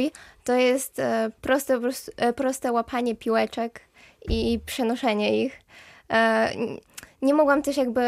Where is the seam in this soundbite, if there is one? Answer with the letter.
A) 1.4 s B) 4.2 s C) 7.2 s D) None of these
D